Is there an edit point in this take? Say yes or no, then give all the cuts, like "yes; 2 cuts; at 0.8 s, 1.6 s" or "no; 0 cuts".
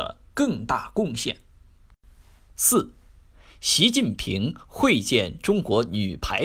no; 0 cuts